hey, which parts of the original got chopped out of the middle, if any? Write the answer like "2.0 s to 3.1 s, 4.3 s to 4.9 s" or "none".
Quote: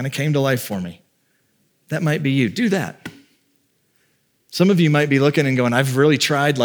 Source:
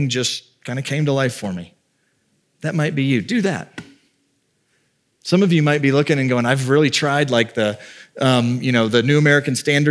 none